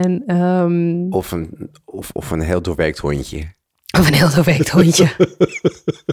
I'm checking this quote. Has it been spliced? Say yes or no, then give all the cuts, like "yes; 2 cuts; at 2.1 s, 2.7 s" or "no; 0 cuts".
no; 0 cuts